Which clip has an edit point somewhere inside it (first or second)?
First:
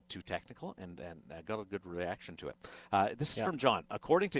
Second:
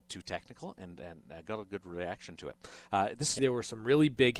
second